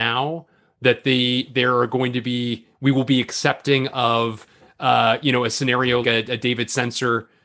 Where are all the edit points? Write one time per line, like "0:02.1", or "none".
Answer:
0:06.0